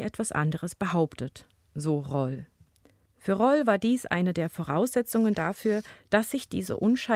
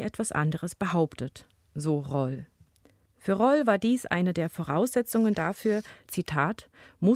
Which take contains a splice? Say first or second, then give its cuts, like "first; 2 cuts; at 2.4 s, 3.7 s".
second; 1 cut; at 6.1 s